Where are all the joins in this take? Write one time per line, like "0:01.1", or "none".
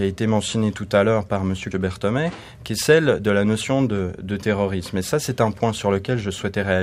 0:01.7